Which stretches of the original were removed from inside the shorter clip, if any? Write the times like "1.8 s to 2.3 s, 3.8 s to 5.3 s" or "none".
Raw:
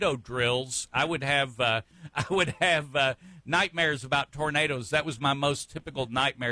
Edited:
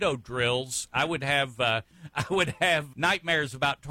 2.9 s to 3.4 s

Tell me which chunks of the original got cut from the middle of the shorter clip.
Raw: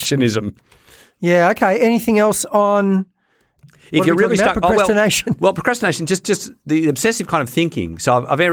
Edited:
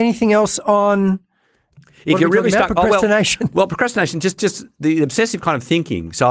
none

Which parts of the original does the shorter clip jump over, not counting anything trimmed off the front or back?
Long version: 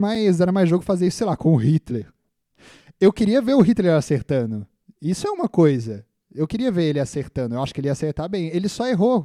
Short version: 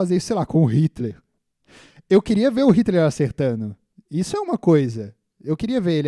none

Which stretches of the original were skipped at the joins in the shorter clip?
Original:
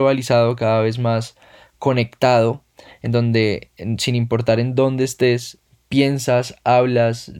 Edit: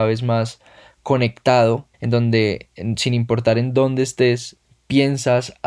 2.7 s to 3.0 s

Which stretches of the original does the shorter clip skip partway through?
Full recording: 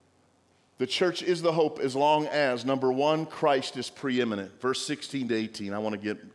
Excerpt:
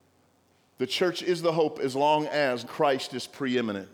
2.6 s to 3.3 s

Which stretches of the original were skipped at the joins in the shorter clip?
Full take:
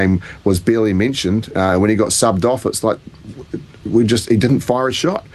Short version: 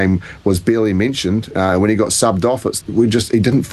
2.8 s to 3.8 s

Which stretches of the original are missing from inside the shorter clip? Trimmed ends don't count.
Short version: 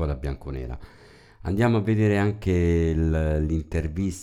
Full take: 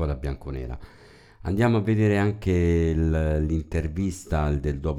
none

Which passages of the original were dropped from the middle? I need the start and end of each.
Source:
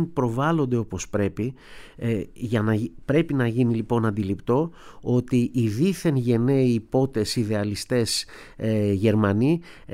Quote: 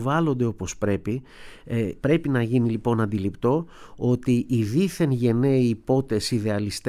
2.3 s to 3.1 s

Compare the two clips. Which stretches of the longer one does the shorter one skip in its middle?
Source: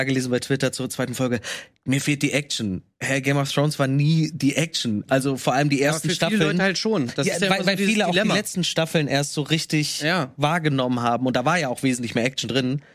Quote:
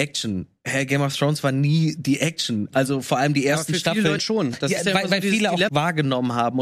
6.5 s to 6.7 s, 8.2 s to 10.4 s

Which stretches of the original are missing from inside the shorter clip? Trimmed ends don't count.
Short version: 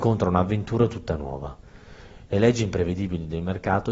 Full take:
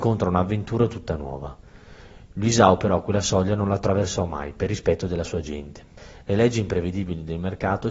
2.3 s to 6.2 s

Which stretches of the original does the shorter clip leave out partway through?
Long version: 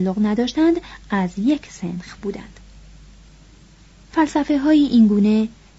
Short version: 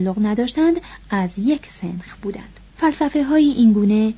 2.7 s to 4.0 s

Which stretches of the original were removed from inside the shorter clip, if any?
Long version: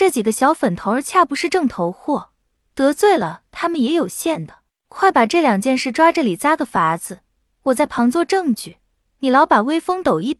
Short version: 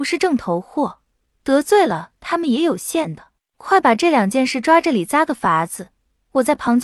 none

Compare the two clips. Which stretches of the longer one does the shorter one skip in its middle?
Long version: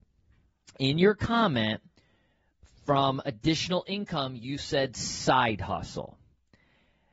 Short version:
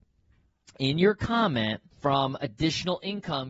1.9 s to 2.7 s

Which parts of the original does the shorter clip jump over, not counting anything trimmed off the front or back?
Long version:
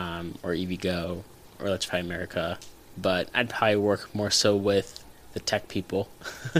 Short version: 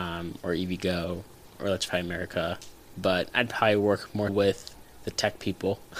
4.3 s to 4.6 s

